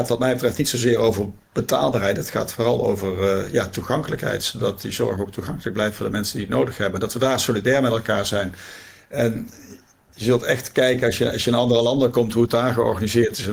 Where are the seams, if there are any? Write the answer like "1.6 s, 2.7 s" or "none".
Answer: none